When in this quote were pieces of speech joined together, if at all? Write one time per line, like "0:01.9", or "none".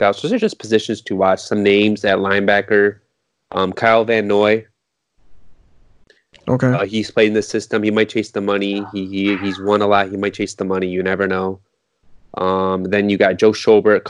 none